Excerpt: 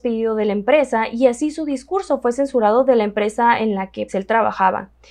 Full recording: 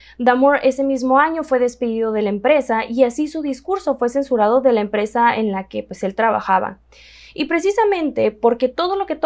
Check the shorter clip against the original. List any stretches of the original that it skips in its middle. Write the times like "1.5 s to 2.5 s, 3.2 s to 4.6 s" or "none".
5.8 s to 6.0 s